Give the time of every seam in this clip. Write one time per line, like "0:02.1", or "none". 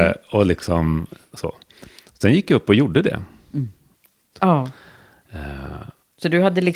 0:04.3